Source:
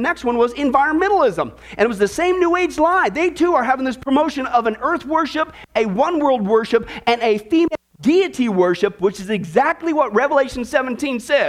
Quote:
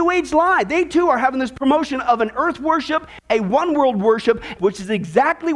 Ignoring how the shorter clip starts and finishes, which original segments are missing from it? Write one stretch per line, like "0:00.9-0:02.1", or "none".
0:07.0-0:09.0